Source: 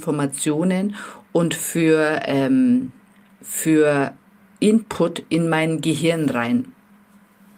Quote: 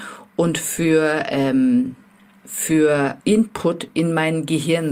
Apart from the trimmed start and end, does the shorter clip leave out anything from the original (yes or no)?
yes